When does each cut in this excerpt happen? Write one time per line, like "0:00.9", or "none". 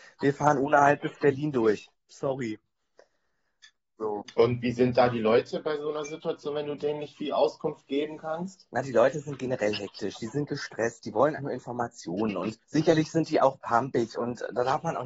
0:11.4
0:12.6